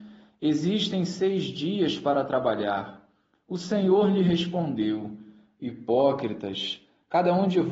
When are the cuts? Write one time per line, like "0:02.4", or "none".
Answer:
0:03.3